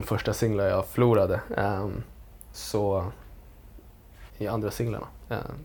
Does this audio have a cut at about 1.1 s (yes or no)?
no